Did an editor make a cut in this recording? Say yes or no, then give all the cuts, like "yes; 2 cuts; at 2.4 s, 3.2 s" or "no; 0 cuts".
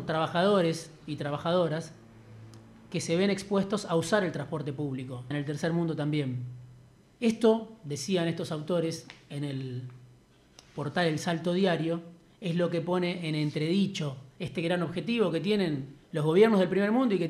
yes; 3 cuts; at 5.3 s, 7.0 s, 16.0 s